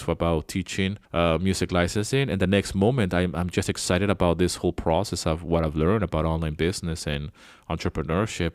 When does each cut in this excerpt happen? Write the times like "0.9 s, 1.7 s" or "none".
1.0 s